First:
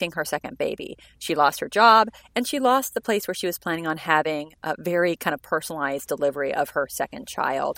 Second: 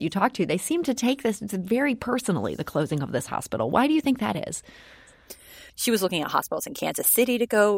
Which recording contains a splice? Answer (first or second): second